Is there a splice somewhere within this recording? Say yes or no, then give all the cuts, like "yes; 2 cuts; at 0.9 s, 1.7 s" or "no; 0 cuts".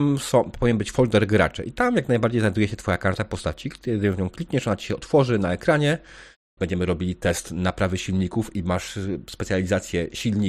yes; 1 cut; at 6.6 s